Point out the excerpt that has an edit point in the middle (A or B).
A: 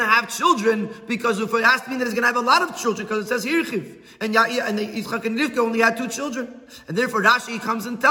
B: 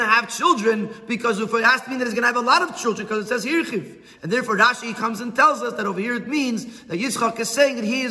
B